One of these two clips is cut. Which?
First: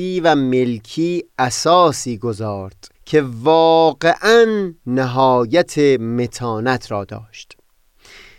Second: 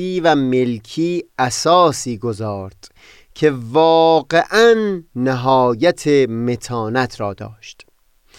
first; 1 cut; at 2.9 s

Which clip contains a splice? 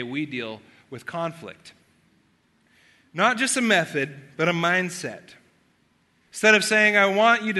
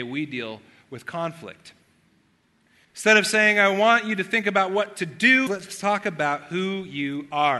second; 2 cuts; at 2.8 s, 5.5 s

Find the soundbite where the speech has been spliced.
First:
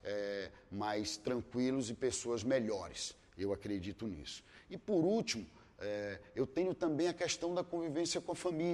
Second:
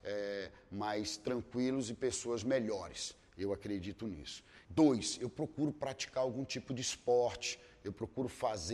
second; 1 cut; at 4.6 s

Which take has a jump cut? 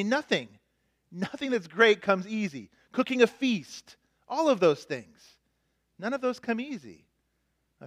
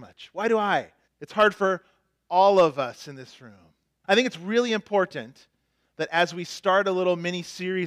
second; 2 cuts; at 1.0 s, 4.0 s

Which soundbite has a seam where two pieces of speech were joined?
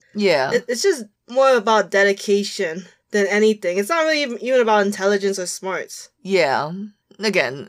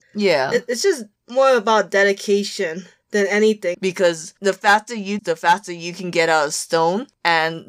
second; 2 cuts; at 3.7 s, 5.2 s

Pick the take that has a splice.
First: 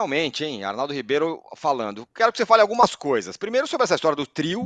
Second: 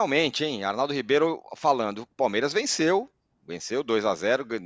second; 1 cut; at 2.1 s

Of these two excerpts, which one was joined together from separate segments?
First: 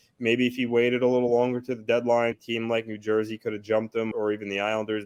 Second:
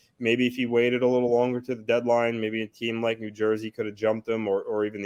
first; 2 cuts; at 2.3 s, 4.1 s

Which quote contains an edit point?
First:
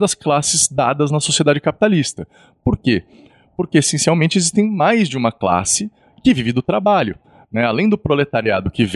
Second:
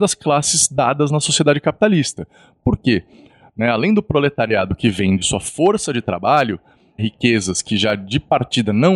second; 2 cuts; at 3.4 s, 7.0 s

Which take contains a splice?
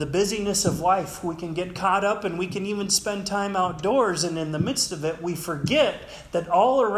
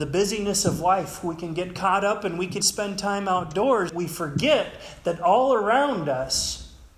second; 2 cuts; at 2.6 s, 3.9 s

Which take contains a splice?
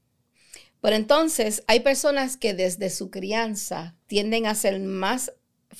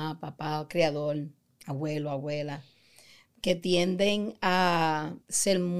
first; 1 cut; at 4.0 s

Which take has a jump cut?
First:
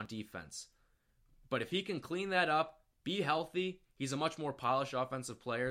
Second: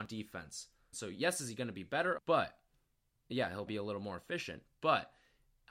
second; 3 cuts; at 0.9 s, 2.2 s, 3.7 s

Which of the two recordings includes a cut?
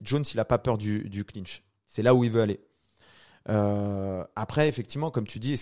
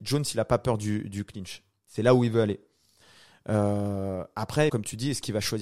second; 1 cut; at 4.7 s

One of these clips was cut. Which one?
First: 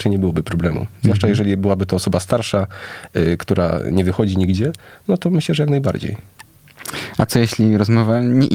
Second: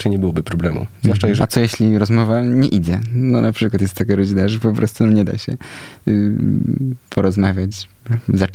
second; 1 cut; at 1.4 s

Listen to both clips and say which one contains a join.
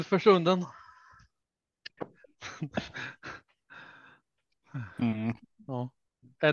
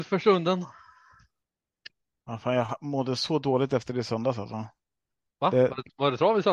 first; 1 cut; at 2.0 s

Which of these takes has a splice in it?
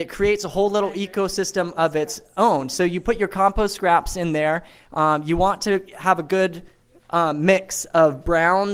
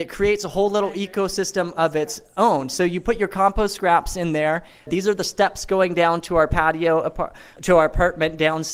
second; 2 cuts; at 4.9 s, 7.6 s

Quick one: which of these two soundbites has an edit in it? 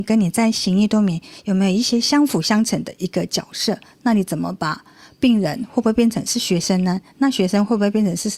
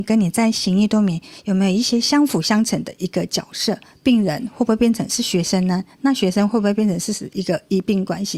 second; 1 cut; at 3.9 s

